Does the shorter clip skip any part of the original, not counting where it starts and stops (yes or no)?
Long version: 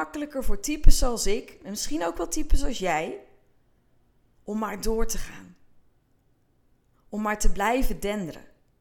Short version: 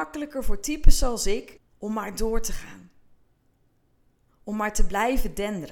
yes